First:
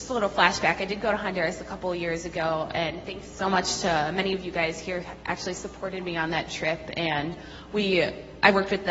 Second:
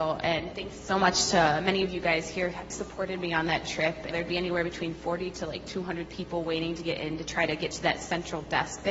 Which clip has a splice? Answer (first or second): second